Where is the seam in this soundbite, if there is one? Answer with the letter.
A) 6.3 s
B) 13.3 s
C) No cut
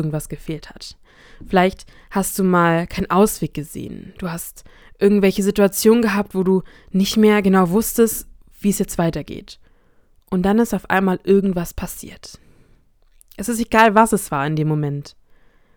C